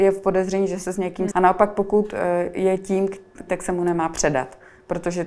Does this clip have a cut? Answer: yes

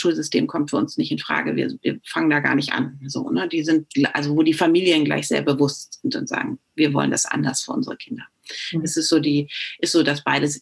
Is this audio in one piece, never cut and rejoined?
yes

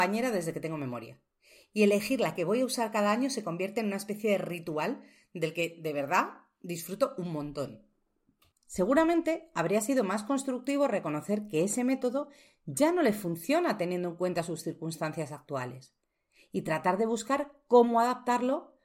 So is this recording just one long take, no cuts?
no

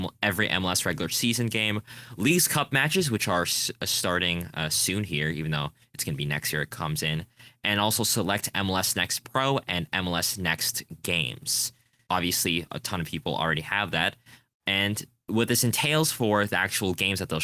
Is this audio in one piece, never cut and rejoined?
no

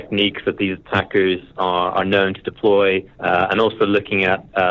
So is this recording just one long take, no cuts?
no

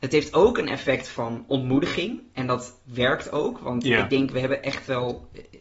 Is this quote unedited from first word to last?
yes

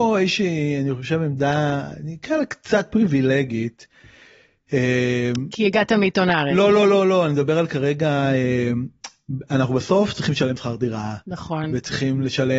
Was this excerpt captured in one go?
yes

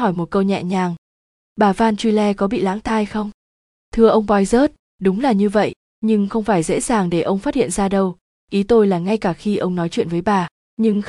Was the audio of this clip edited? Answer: no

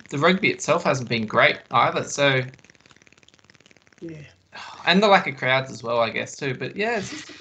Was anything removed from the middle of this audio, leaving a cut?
no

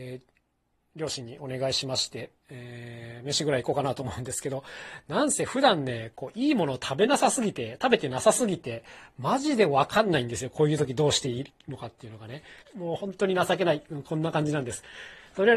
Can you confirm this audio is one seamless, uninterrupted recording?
no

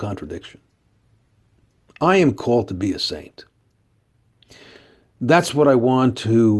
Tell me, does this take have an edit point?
no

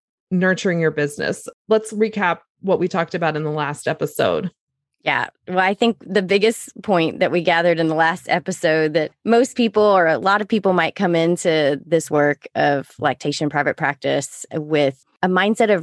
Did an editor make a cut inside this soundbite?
no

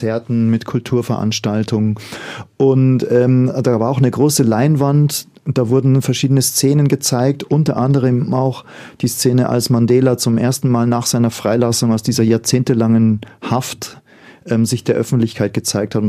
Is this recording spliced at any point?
no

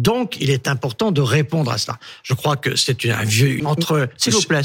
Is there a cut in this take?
yes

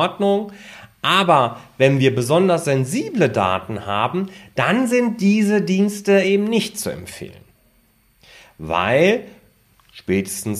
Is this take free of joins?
yes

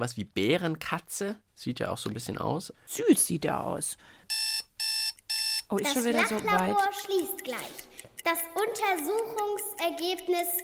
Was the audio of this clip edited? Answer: no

